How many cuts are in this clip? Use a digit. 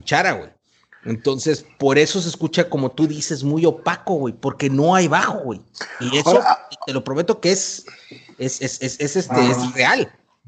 0